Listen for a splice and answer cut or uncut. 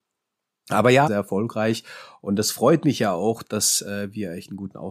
cut